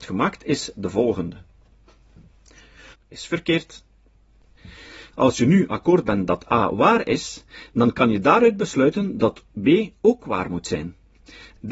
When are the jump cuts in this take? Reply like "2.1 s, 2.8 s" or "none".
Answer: 2.9 s, 5.1 s